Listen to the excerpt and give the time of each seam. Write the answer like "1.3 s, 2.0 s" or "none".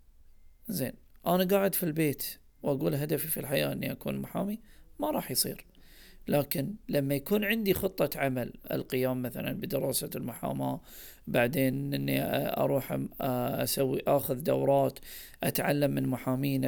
8.6 s